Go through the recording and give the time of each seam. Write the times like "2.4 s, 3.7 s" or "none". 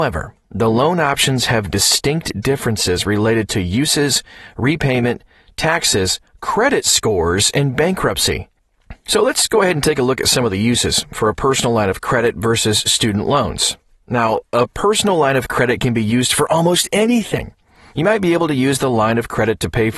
none